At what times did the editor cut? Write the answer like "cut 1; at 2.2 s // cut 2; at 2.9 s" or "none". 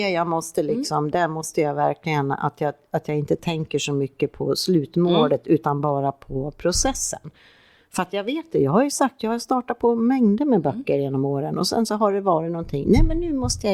none